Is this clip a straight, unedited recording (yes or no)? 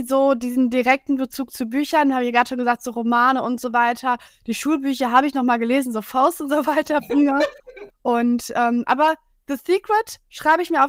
no